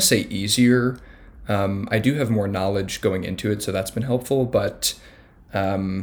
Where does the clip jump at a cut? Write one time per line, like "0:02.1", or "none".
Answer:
none